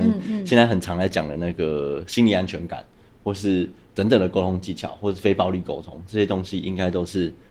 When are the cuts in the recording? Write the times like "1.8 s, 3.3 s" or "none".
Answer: none